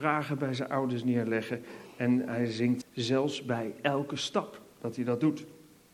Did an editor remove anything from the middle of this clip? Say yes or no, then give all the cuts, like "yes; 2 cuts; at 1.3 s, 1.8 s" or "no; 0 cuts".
yes; 1 cut; at 2.8 s